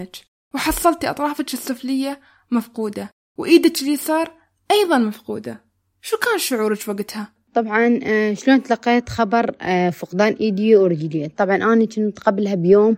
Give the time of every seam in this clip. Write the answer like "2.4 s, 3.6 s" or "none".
7.5 s